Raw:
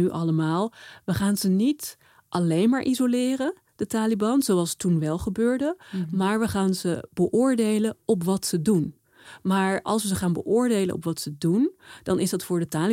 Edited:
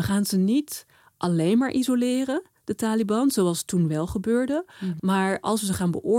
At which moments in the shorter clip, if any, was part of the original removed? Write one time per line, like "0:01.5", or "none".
0:05.0